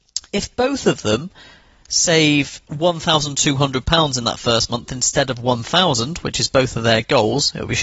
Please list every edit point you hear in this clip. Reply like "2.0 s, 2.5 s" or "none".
2.7 s